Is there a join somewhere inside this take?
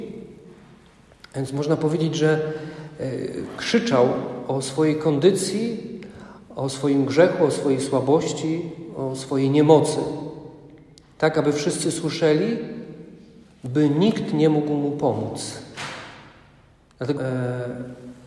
yes; 1 cut; at 17.2 s

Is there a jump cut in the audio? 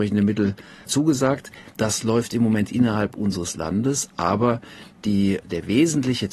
yes; 1 cut; at 5.4 s

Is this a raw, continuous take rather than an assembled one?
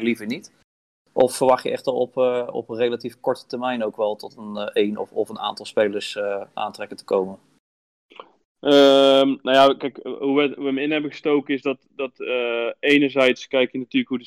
yes; 0 cuts

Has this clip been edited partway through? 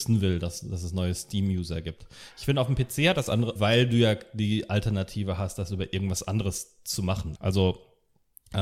yes; 2 cuts; at 3.6 s, 7.4 s

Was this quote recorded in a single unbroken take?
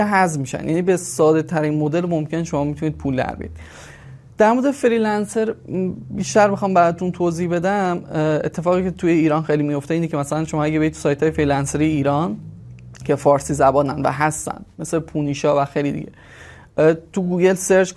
yes; 0 cuts

